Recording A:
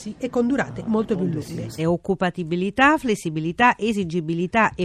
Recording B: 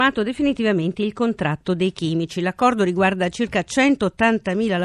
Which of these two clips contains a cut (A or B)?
A